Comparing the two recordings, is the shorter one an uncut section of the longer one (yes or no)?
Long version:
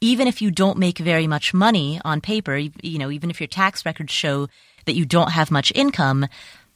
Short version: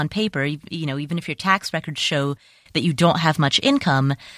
yes